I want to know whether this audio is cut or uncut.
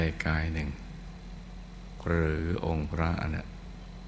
uncut